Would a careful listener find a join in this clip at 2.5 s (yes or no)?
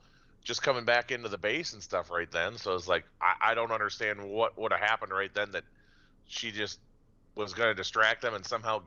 no